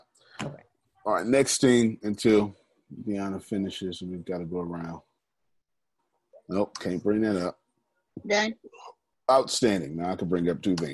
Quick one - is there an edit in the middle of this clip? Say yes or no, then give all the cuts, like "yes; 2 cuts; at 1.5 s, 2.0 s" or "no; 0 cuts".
no; 0 cuts